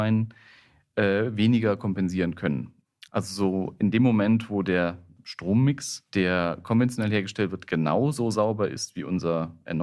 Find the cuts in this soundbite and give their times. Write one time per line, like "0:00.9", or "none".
0:03.1